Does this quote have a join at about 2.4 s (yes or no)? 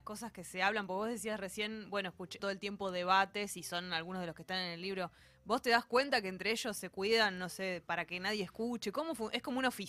yes